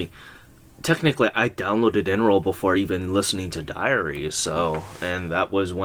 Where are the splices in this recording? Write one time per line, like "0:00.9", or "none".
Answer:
none